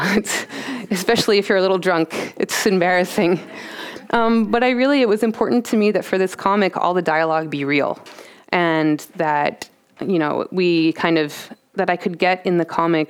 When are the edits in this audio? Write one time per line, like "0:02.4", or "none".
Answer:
none